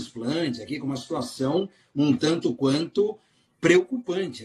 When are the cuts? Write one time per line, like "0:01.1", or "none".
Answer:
none